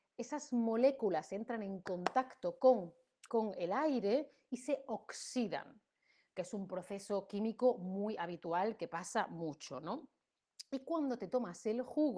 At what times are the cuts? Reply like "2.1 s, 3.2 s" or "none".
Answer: 3.3 s